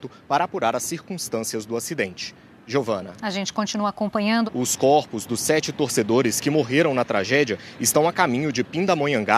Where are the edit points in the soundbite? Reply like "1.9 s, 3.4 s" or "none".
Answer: 4.5 s